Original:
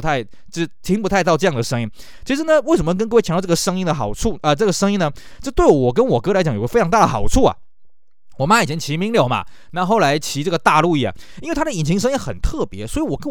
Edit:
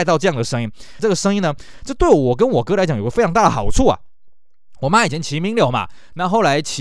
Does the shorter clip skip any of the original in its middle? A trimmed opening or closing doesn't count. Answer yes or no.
yes